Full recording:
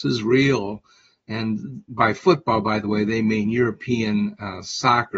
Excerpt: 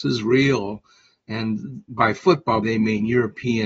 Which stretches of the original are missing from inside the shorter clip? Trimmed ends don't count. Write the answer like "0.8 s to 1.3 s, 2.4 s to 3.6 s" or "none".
2.6 s to 3.1 s